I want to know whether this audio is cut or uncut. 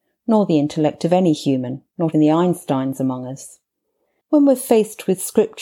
cut